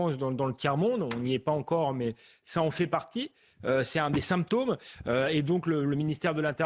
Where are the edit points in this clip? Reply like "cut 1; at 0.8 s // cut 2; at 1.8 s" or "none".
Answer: none